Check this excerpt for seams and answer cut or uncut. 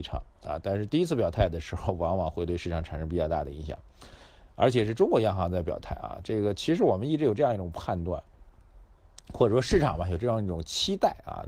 uncut